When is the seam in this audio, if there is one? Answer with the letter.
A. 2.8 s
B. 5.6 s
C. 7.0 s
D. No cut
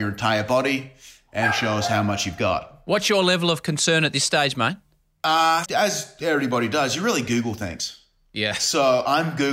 B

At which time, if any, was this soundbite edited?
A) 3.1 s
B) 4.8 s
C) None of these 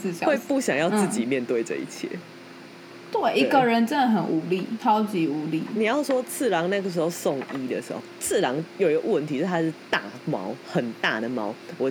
B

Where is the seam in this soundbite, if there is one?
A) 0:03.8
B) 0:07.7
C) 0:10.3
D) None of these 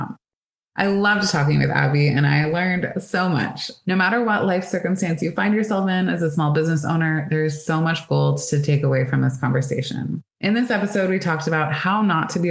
C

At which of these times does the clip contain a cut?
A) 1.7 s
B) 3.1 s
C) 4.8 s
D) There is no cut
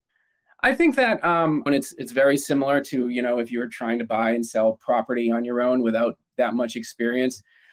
A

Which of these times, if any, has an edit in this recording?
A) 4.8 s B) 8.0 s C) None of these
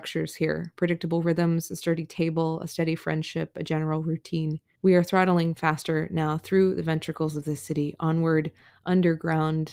A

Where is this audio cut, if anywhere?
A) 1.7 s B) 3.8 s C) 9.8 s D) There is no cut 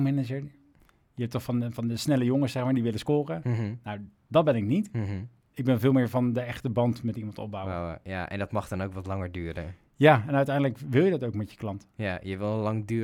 D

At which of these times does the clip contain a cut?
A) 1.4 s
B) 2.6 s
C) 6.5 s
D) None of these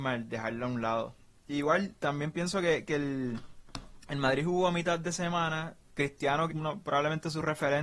C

